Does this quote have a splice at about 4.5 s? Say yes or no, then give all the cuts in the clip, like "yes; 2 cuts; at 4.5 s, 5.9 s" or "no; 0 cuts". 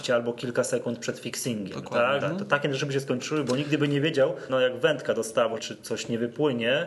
yes; 3 cuts; at 2.2 s, 4.5 s, 5.6 s